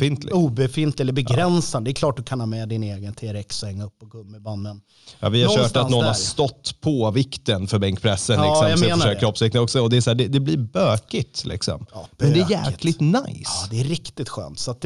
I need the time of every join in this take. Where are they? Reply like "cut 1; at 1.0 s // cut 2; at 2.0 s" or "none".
none